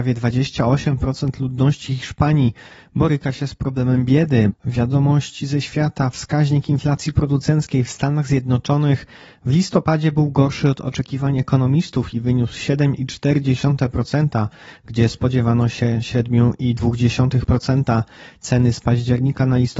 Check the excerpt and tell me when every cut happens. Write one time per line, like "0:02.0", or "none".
0:04.5